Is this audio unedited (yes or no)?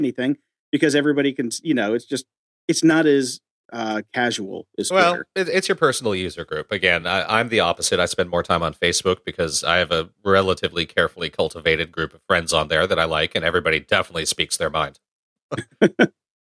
yes